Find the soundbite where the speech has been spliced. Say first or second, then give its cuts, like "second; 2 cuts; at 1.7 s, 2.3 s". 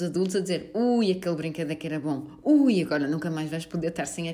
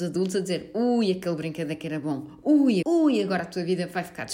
second; 1 cut; at 2.8 s